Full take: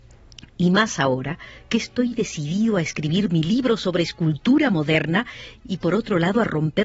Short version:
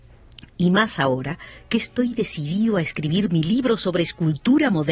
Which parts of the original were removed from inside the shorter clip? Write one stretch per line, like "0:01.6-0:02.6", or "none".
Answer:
none